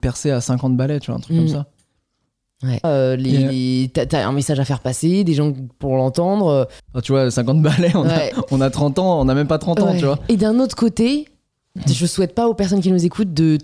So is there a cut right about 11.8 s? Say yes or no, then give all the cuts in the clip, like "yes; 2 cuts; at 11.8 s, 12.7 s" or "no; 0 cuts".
yes; 3 cuts; at 2.8 s, 6.8 s, 11.8 s